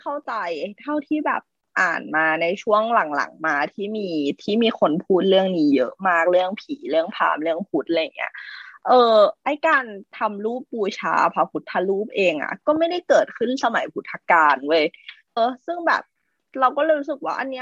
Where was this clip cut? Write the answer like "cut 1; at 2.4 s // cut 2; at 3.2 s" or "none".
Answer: cut 1; at 15.4 s

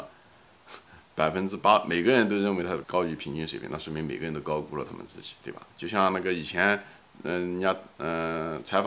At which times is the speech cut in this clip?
cut 1; at 2.8 s // cut 2; at 5.7 s

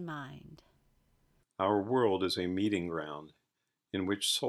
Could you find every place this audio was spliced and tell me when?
cut 1; at 1.4 s

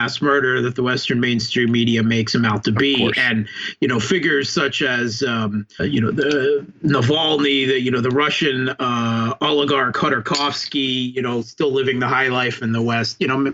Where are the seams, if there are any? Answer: cut 1; at 5.8 s

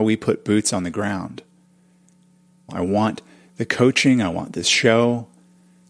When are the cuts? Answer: cut 1; at 2.7 s

